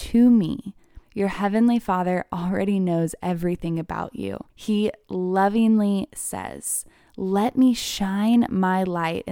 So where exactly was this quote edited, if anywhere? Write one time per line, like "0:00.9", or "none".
0:01.0
0:04.5